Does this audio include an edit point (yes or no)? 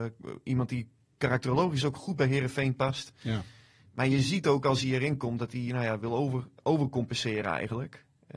no